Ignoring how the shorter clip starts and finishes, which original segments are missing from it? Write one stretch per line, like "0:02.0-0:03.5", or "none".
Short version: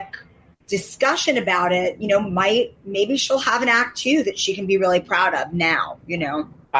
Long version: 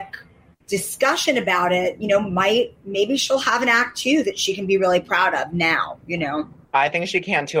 none